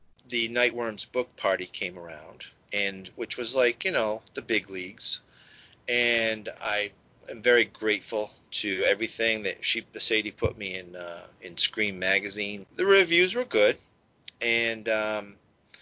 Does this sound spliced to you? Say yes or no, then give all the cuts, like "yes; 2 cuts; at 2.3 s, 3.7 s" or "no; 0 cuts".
yes; 1 cut; at 12.6 s